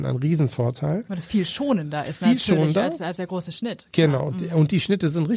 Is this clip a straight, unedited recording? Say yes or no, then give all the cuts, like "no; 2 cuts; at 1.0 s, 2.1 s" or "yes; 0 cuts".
yes; 0 cuts